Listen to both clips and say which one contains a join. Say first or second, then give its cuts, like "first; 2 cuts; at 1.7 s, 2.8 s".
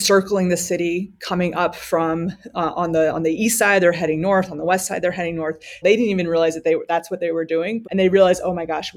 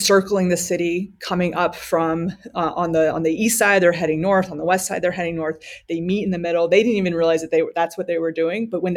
first; 2 cuts; at 5.8 s, 7.8 s